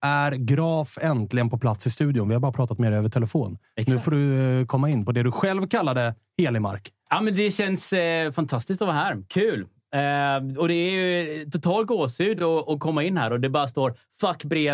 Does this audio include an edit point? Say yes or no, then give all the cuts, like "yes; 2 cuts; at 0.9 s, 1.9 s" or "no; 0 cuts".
no; 0 cuts